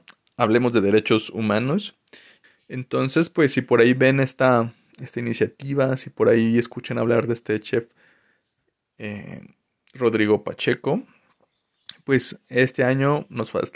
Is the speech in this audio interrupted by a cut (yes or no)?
yes